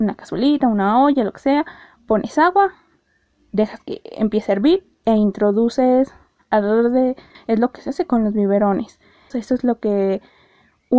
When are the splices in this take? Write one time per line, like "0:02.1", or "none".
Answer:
0:07.3
0:09.3